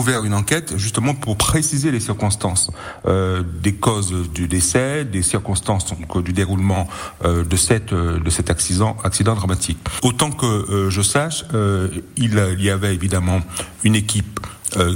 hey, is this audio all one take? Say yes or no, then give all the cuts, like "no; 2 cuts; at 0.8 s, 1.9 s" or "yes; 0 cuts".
no; 1 cut; at 10.0 s